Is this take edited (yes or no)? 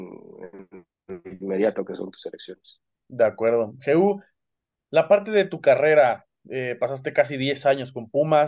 no